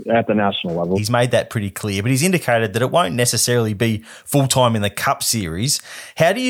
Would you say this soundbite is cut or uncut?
cut